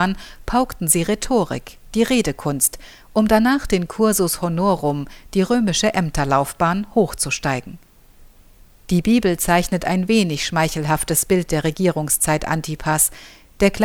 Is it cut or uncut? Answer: uncut